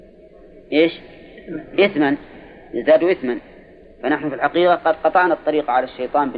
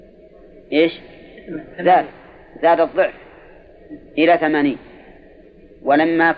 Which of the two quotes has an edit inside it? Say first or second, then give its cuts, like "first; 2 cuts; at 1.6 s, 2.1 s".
second; 1 cut; at 1.7 s